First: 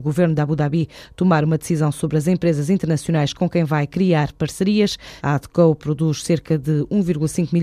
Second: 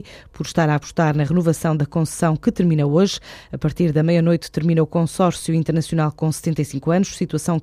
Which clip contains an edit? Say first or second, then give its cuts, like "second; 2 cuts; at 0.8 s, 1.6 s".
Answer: first; 1 cut; at 5.2 s